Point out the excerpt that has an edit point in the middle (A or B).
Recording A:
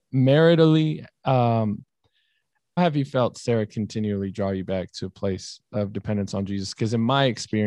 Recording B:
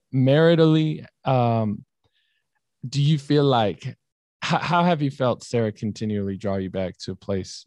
A